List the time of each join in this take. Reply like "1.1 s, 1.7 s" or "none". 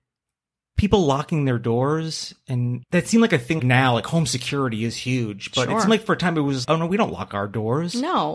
3.6 s, 6.6 s